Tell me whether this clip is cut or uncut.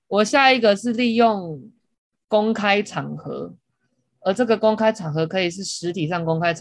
uncut